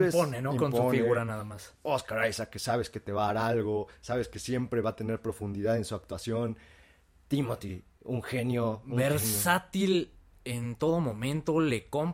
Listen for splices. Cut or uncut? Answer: uncut